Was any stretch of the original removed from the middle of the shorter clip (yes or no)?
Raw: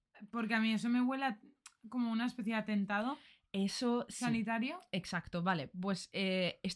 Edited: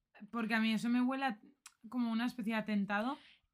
no